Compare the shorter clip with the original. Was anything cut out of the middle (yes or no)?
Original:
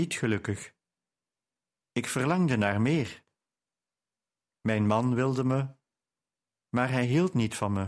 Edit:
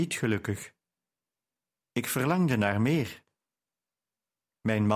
no